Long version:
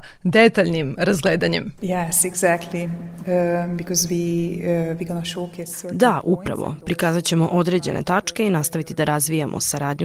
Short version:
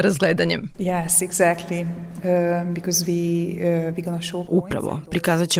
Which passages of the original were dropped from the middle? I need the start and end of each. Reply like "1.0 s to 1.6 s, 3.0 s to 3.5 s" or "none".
5.5 s to 6.2 s